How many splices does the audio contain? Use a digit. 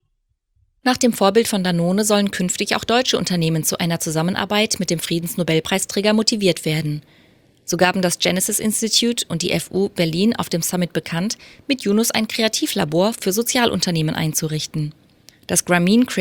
0